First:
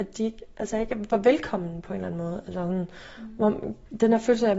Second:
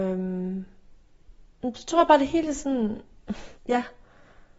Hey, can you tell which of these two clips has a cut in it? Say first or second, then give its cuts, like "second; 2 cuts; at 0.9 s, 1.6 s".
second; 1 cut; at 3.6 s